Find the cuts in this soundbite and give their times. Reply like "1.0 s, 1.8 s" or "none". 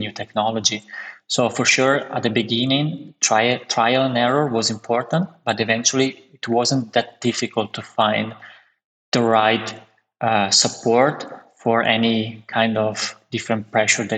none